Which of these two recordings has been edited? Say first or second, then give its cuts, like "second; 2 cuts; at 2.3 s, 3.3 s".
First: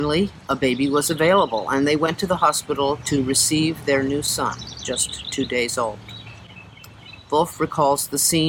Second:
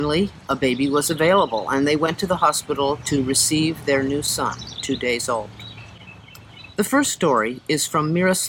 second; 2 cuts; at 4.8 s, 6.7 s